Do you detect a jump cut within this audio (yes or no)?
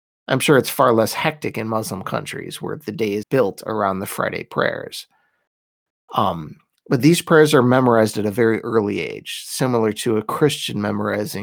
yes